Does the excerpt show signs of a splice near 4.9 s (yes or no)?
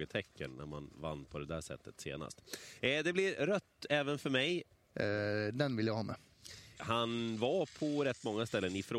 yes